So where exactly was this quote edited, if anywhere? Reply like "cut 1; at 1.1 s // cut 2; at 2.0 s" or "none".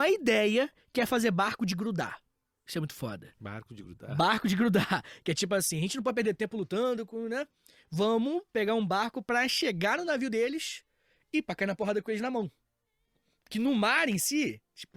none